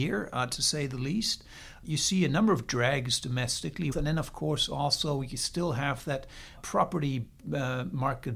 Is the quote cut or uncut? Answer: cut